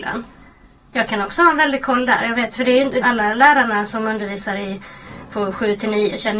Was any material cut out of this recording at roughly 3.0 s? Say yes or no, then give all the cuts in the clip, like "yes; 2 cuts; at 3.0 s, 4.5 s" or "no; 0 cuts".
yes; 1 cut; at 3.0 s